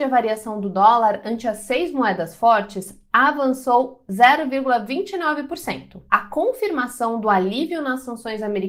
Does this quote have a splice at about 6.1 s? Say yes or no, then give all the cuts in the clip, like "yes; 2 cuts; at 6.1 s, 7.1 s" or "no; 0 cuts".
yes; 1 cut; at 6.1 s